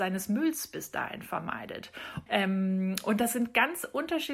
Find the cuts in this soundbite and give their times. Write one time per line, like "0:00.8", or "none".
0:02.3